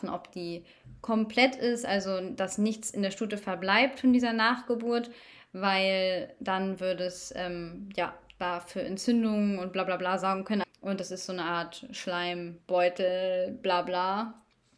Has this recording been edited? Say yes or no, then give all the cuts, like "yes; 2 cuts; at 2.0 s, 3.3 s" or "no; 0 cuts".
yes; 1 cut; at 10.6 s